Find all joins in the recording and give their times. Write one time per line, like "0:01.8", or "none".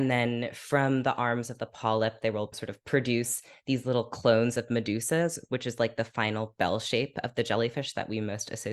none